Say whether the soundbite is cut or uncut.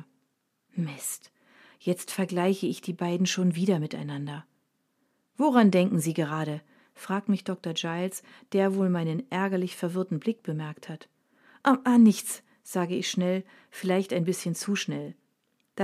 uncut